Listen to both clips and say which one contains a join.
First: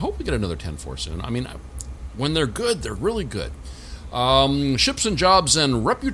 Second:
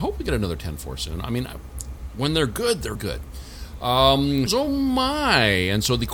second; 2 cuts; at 3.0 s, 4.5 s

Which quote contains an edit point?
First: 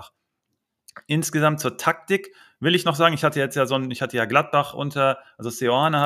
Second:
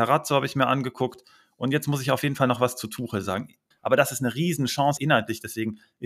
second; 2 cuts; at 3.7 s, 5.0 s

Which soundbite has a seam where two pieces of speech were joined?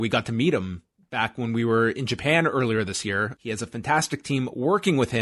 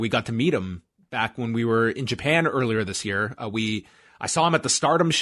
first; 1 cut; at 3.4 s

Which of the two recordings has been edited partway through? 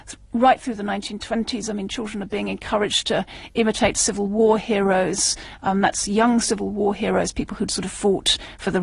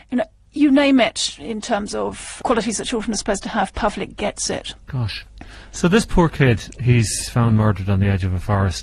second; 1 cut; at 4.8 s

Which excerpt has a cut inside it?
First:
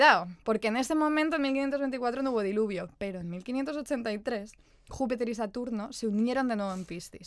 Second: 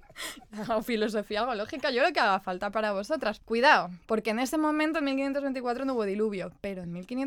second; 1 cut; at 3.4 s

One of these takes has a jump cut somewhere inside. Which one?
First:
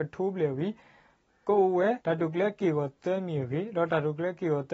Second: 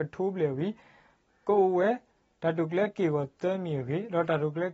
first; 1 cut; at 2.0 s

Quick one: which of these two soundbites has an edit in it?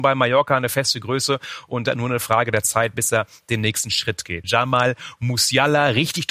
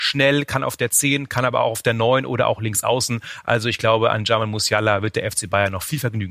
first; 1 cut; at 4.4 s

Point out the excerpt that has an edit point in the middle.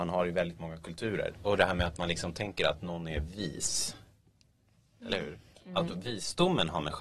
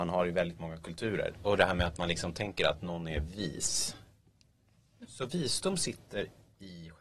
second; 1 cut; at 5.0 s

